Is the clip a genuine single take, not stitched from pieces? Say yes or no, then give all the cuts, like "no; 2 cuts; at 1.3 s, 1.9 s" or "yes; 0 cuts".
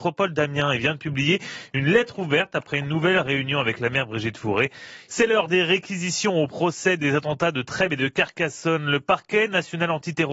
no; 1 cut; at 5.1 s